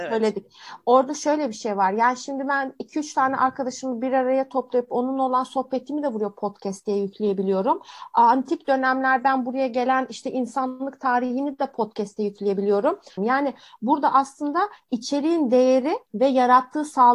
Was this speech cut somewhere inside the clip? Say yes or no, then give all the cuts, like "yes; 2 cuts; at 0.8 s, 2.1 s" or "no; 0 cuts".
yes; 1 cut; at 13.2 s